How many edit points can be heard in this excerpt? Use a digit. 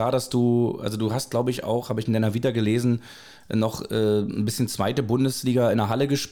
0